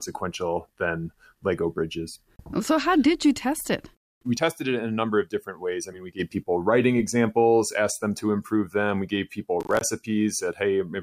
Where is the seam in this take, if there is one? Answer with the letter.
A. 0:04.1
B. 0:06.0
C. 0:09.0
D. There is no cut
D